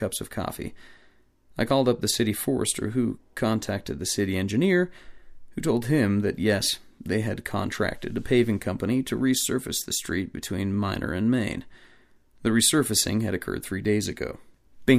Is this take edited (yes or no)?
no